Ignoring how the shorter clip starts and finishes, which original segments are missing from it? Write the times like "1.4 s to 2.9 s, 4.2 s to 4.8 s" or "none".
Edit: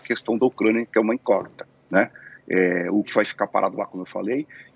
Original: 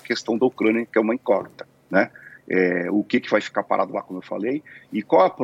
3.0 s to 3.2 s